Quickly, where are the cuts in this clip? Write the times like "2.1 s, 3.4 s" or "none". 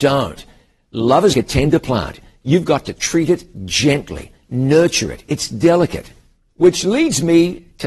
1.3 s, 6.5 s